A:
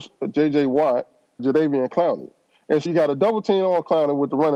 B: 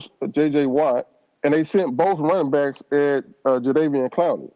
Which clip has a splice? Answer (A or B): A